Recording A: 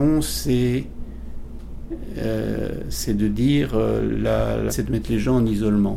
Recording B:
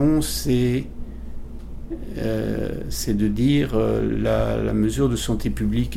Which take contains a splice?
A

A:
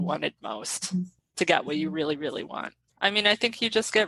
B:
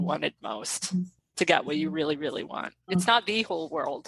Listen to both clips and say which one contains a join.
B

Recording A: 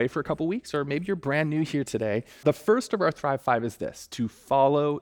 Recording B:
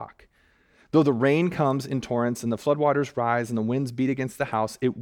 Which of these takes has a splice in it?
A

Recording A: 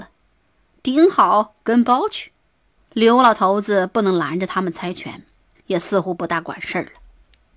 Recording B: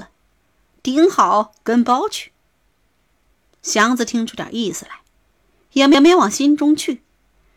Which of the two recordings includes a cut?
A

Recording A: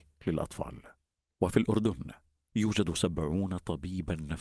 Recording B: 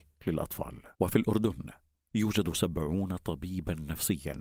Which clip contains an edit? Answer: B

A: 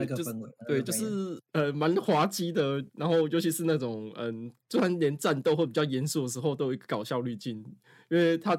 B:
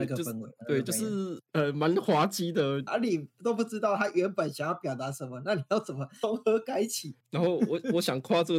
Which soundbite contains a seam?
B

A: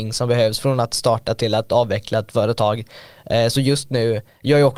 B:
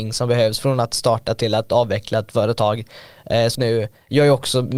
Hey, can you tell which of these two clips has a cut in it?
B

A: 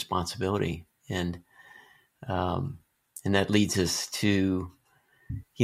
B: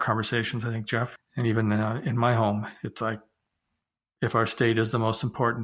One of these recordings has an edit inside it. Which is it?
B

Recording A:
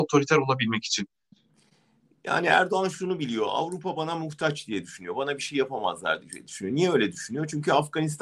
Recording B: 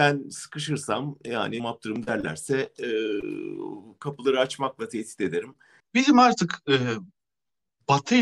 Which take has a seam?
B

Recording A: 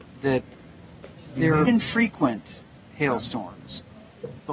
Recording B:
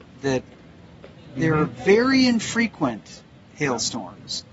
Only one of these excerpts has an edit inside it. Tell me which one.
A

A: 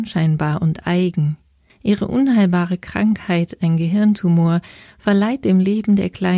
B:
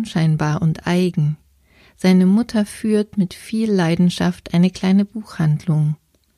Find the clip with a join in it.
A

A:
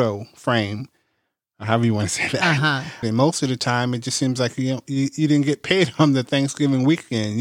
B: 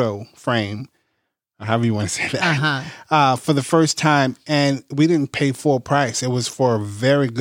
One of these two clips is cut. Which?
A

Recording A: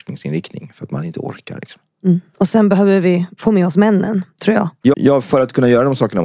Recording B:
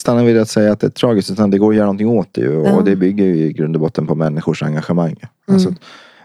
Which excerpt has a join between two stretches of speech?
A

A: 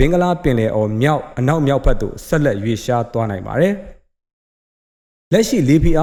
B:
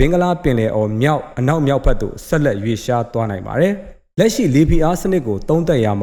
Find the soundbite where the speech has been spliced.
B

